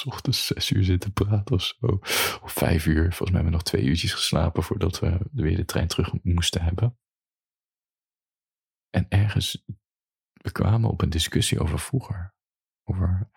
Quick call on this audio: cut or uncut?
uncut